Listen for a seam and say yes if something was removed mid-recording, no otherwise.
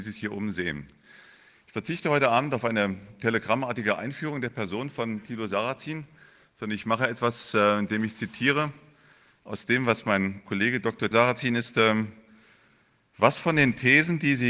yes